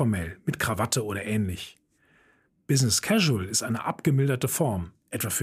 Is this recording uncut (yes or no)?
yes